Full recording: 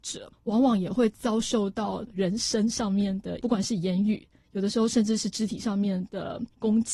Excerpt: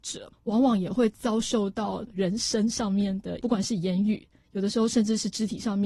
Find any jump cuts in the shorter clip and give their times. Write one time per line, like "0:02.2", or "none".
none